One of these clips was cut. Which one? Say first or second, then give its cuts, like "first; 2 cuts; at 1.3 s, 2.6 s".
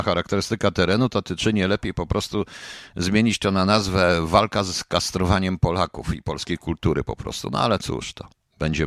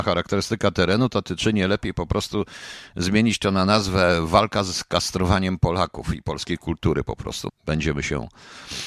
second; 1 cut; at 7.5 s